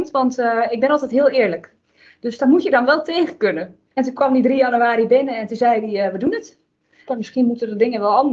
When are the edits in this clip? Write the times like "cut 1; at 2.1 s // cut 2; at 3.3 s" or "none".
cut 1; at 3.9 s // cut 2; at 7.1 s

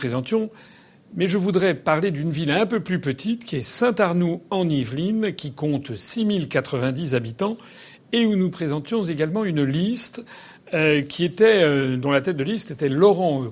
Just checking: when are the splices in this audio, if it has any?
none

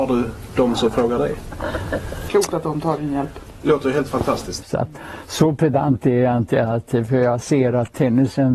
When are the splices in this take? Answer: cut 1; at 2.3 s // cut 2; at 4.6 s

